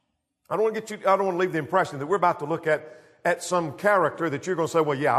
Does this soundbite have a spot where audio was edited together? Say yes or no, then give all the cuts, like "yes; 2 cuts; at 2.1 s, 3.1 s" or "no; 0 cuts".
no; 0 cuts